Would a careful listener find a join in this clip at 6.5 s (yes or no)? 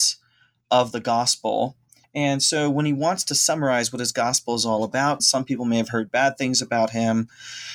no